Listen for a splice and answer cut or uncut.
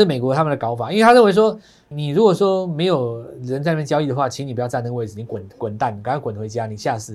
cut